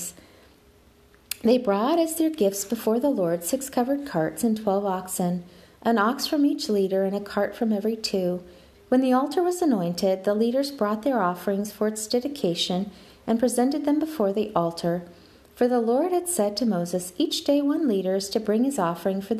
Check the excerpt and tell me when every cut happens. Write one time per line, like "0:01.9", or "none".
0:08.7